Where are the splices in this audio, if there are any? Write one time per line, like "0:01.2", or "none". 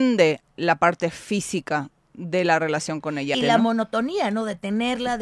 0:03.3